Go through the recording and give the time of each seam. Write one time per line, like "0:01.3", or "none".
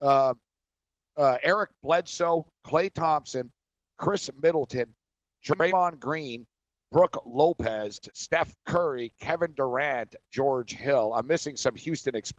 none